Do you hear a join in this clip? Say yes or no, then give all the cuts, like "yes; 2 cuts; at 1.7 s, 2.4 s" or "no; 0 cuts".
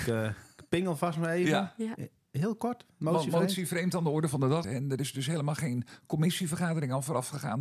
yes; 1 cut; at 4.6 s